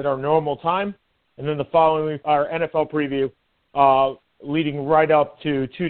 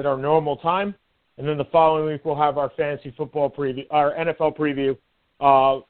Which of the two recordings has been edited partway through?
first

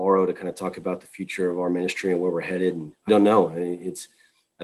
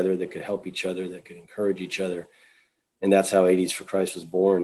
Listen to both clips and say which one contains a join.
first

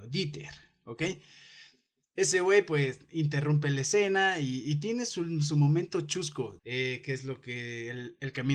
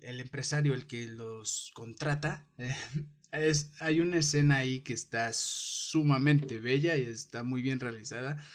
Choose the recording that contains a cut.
first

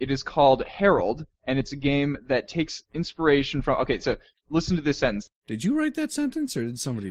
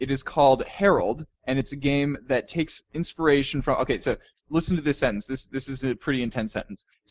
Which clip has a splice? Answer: first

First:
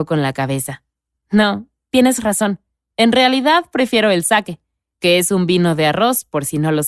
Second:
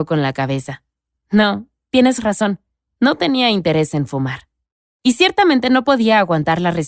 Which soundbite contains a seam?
second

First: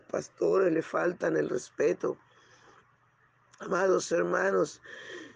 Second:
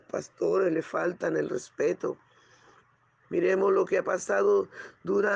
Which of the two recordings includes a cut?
second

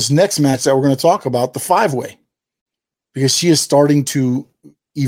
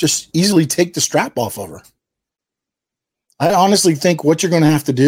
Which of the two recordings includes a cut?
first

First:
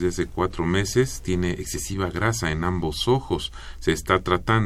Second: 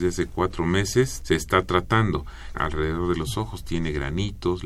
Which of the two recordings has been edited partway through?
second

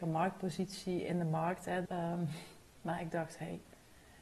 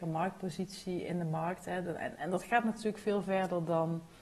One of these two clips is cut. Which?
first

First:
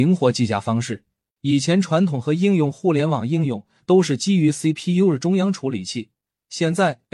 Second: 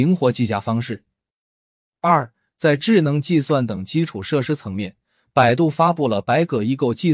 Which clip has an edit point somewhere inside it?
first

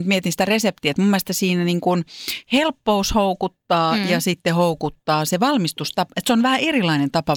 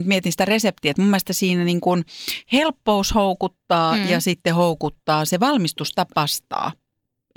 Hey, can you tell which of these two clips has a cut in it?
second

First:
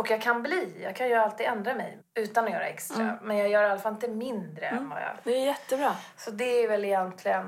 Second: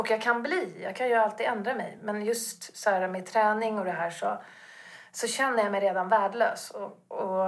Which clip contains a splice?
first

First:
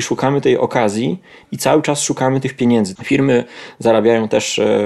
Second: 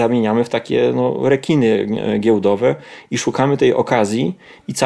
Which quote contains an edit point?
first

